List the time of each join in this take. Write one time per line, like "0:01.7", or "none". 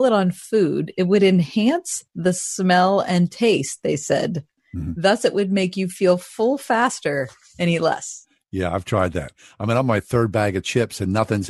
none